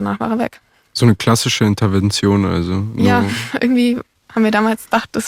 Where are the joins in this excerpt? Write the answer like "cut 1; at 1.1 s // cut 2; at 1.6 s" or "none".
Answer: none